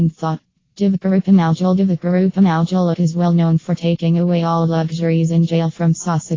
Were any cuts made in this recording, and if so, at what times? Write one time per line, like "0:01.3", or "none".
0:02.9